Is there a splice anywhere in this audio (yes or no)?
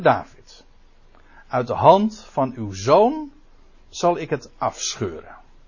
no